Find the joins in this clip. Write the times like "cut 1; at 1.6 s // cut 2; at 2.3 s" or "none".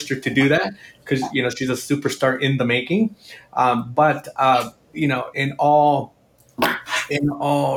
cut 1; at 5.3 s